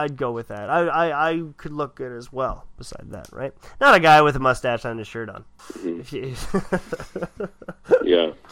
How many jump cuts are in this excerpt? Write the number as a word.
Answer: zero